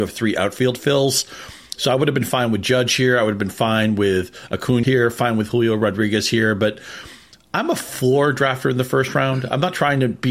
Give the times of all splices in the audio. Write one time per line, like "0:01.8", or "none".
0:04.8